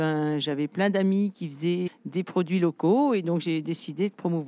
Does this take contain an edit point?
yes; 1 cut; at 1.9 s

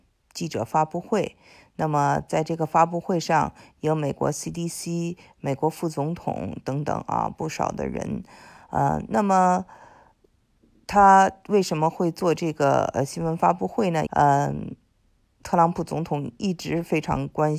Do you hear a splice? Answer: yes; 1 cut; at 14.1 s

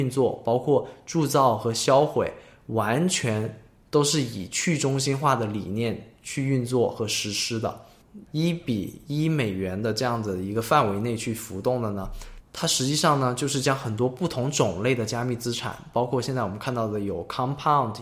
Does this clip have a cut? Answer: yes; 1 cut; at 8.3 s

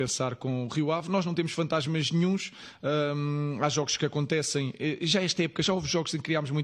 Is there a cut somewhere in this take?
no; 0 cuts

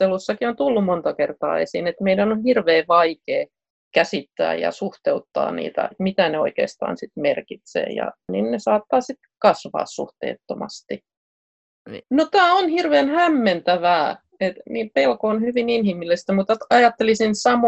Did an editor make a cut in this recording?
yes; 3 cuts; at 5.9 s, 12.0 s, 14.6 s

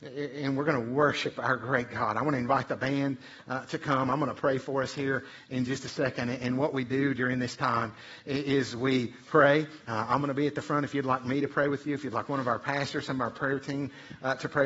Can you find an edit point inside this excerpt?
no; 0 cuts

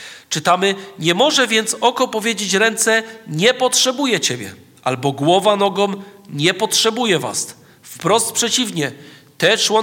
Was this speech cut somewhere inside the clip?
no; 0 cuts

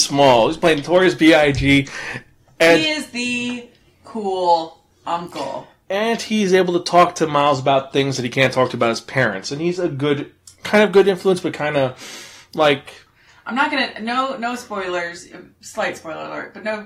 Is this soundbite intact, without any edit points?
yes; 0 cuts

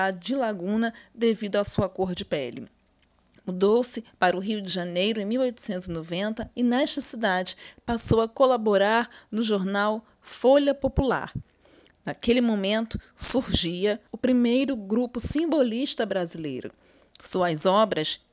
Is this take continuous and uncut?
no; 1 cut; at 14.1 s

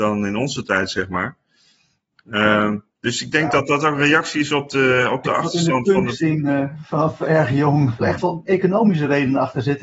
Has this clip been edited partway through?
yes; 1 cut; at 8.0 s

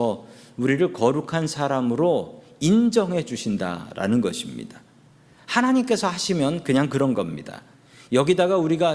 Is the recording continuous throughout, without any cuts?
yes; 0 cuts

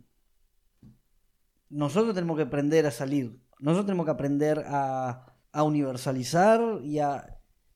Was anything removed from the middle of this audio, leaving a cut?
yes; 2 cuts; at 3.5 s, 5.4 s

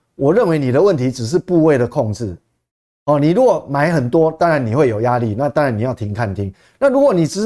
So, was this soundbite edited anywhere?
no; 0 cuts

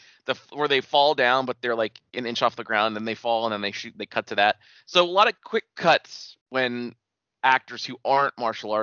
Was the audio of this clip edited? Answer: yes; 1 cut; at 6.4 s

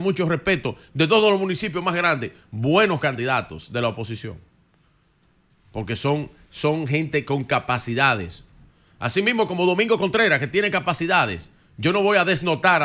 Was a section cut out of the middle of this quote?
no; 0 cuts

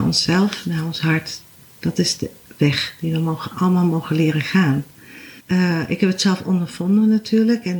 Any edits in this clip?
yes; 1 cut; at 5.4 s

